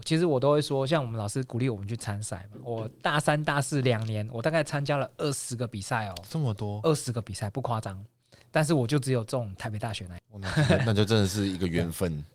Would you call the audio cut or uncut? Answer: uncut